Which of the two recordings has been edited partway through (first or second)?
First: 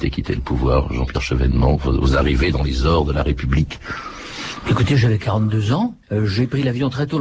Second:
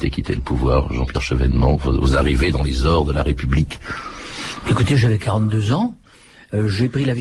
first